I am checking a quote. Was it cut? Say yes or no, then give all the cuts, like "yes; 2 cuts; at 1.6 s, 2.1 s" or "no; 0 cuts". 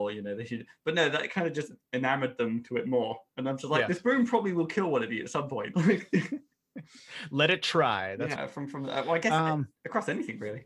yes; 2 cuts; at 5.7 s, 8.4 s